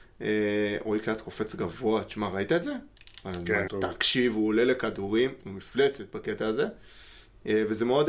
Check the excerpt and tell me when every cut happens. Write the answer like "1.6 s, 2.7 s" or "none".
3.7 s